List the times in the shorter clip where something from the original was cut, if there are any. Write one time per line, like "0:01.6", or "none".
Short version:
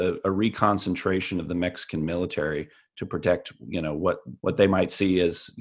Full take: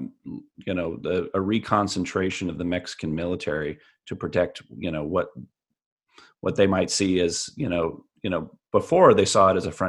0:04.4

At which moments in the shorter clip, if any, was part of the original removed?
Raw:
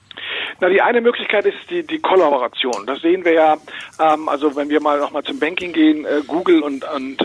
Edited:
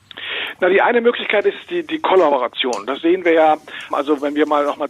0:03.9

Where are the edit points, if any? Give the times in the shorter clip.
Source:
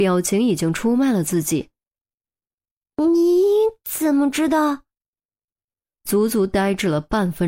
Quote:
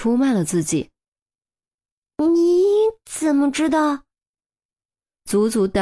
none

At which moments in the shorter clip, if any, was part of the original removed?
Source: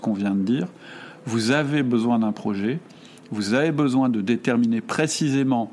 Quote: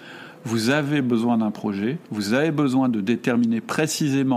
0:02.0

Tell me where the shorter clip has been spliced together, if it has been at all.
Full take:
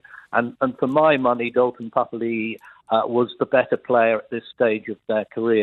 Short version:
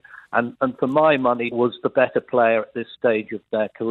0:01.5

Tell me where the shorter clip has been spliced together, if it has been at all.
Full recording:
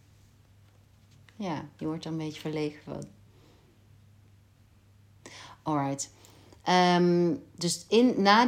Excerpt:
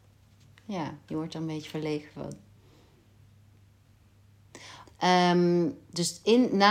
0:04.9

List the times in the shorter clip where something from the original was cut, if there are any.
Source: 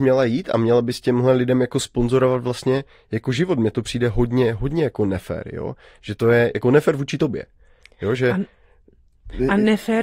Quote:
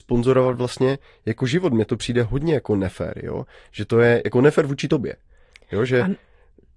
0:02.2

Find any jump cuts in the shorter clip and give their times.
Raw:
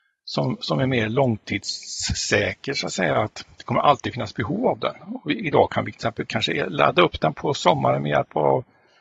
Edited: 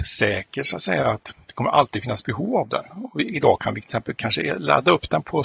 none

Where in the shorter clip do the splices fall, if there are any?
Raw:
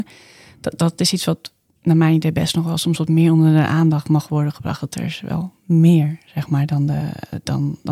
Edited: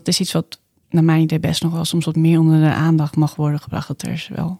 none

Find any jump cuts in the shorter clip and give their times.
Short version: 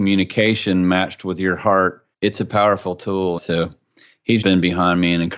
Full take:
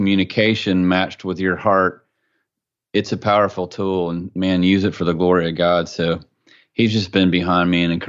0:02.1
0:03.4
0:04.4

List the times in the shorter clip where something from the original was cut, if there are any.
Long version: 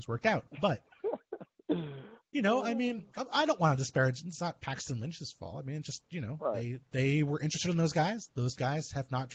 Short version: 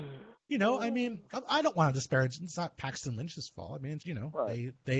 0:04.0

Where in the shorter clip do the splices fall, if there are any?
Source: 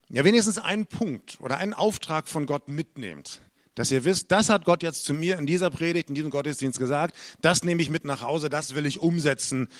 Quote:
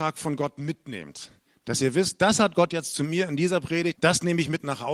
0:04.0

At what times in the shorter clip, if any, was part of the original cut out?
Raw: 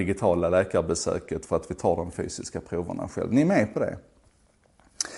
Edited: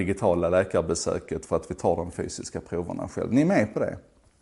none

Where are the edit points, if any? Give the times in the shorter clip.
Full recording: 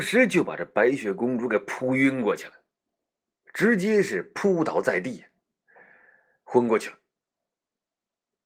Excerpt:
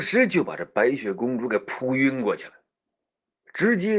none

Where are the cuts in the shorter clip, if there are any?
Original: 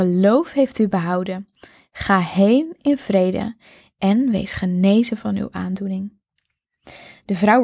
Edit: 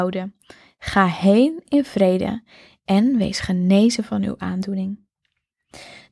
none

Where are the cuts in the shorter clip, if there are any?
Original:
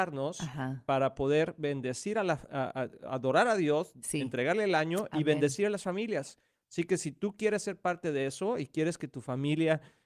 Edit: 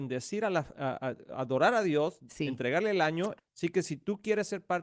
0:03.4

